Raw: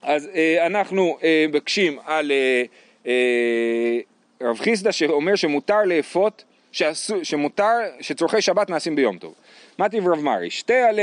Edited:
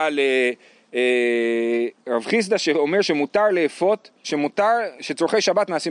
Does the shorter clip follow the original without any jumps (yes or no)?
no